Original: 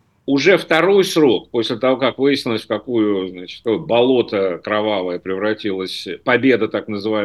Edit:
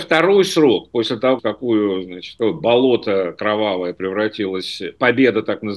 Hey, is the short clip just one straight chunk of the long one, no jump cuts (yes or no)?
no